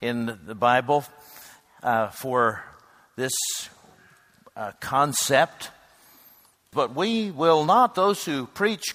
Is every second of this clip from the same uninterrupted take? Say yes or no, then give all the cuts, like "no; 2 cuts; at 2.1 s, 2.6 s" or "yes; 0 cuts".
no; 1 cut; at 6.7 s